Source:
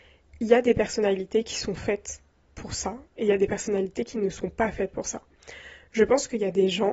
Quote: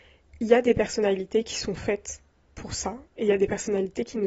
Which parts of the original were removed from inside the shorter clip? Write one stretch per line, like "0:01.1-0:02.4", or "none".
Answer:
none